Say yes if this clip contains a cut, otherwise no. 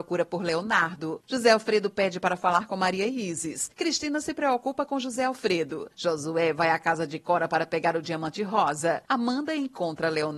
yes